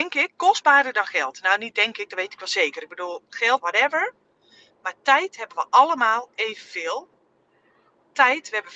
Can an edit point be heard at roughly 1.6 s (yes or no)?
no